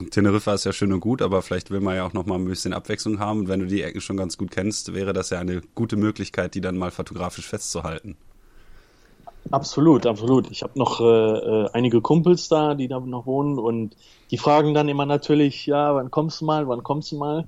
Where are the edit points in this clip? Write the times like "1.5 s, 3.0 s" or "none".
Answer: none